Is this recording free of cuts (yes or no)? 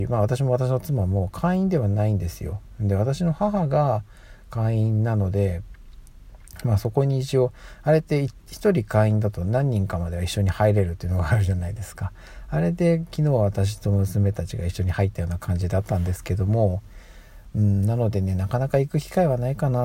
yes